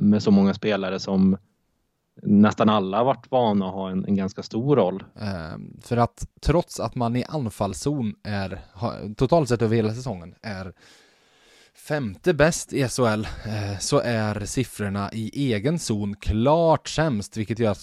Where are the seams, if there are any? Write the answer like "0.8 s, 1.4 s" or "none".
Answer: 5.1 s